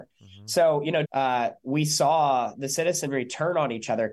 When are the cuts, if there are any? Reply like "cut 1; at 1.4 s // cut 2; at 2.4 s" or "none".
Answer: cut 1; at 1.0 s